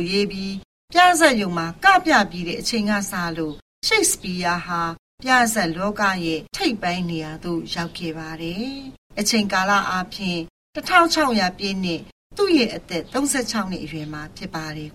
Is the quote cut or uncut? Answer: cut